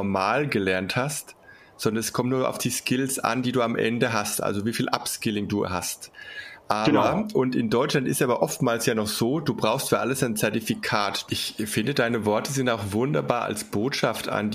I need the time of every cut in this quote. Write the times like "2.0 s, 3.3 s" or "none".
11.3 s

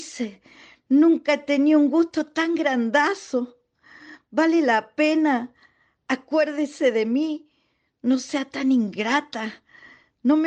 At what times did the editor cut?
none

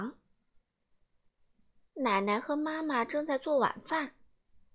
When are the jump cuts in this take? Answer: none

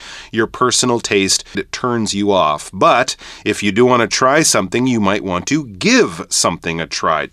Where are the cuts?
1.5 s

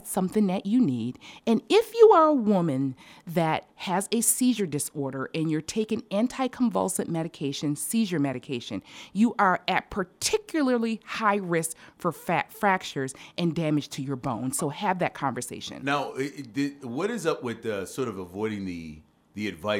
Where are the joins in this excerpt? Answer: none

